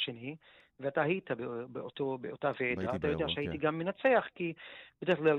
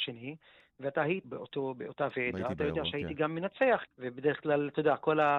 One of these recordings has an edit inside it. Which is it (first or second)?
second